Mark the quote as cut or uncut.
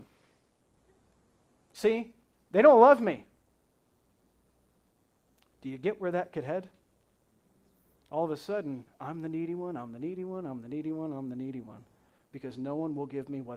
uncut